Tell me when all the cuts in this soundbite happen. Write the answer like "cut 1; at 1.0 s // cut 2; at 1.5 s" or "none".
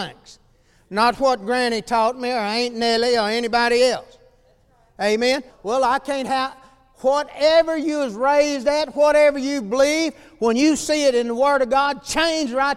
cut 1; at 5.5 s